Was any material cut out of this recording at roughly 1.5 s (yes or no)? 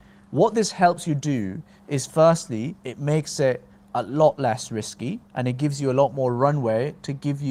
no